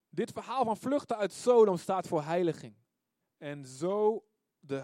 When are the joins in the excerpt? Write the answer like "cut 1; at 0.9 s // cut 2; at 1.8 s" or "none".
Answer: cut 1; at 3.2 s